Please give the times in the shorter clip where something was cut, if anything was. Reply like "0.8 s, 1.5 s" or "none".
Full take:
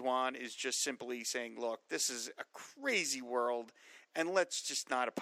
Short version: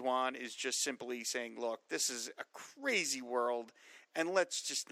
none